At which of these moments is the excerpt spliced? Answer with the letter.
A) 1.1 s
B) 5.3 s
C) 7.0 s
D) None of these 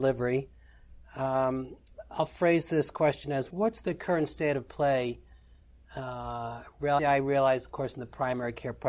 C